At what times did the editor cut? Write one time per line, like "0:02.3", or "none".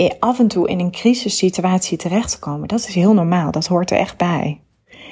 none